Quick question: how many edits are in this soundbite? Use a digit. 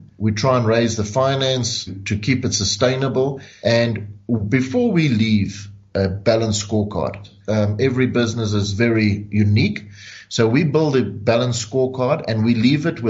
1